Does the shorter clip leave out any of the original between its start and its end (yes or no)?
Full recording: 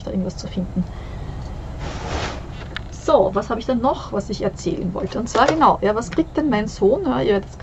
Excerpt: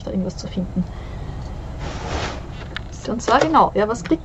yes